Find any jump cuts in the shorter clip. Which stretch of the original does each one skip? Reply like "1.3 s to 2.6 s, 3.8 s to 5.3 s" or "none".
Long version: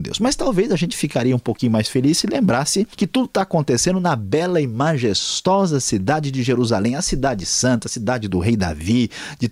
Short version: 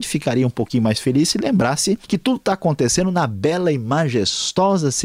none